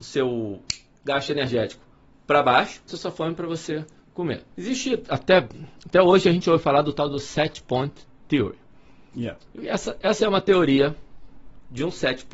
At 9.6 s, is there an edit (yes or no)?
no